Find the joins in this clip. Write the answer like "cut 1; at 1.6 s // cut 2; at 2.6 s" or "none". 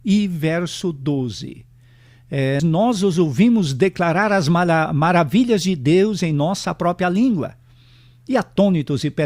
cut 1; at 2.6 s